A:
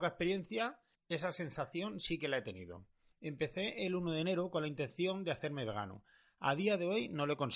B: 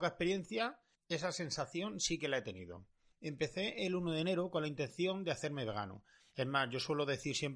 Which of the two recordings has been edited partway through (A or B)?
B